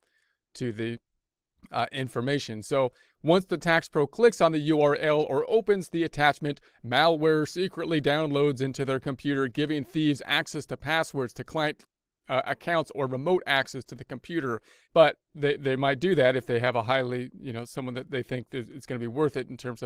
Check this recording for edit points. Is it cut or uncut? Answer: cut